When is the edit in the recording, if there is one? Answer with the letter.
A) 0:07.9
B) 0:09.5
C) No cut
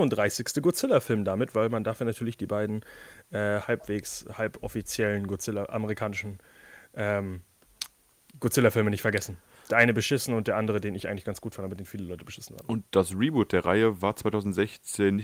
C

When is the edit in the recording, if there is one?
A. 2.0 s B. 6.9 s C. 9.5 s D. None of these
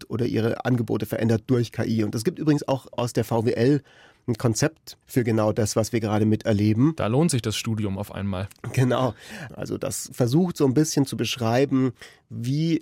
C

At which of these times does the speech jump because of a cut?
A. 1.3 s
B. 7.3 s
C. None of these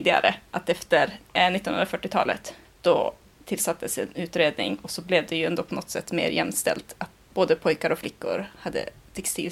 B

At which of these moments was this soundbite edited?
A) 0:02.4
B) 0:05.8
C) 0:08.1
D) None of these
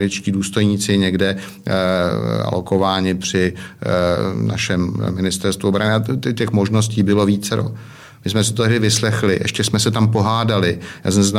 D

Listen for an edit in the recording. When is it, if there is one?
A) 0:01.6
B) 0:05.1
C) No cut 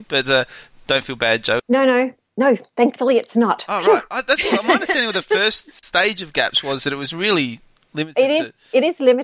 A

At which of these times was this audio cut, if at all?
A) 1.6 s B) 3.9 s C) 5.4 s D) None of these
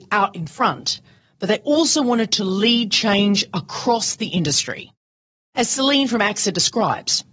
D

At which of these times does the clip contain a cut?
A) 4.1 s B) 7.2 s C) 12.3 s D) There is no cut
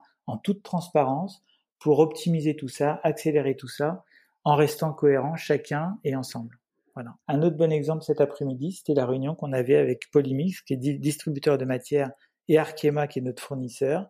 B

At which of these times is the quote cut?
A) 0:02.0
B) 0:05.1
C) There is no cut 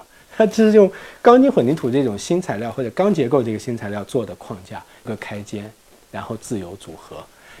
B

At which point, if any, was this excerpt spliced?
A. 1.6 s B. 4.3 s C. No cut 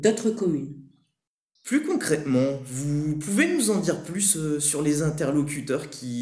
A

